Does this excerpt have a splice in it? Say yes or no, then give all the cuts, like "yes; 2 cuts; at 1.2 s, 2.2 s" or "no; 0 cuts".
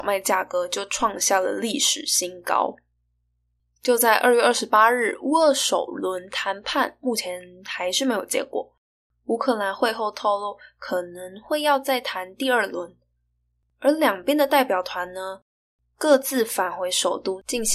no; 0 cuts